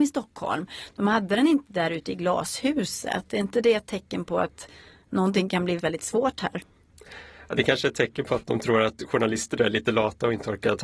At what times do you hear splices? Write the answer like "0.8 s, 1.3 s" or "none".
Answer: 5.8 s